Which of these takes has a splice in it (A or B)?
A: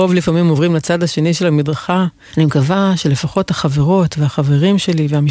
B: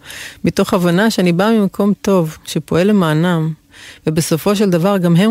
A